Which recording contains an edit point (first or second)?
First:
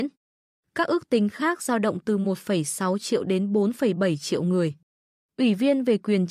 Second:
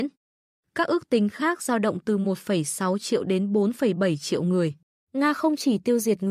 second